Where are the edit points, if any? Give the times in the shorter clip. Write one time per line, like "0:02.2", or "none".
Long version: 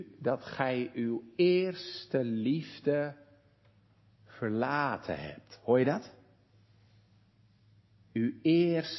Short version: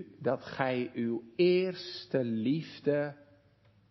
none